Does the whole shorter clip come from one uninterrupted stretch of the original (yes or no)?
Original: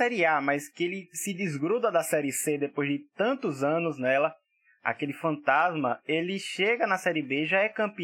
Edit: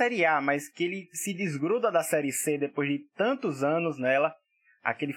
yes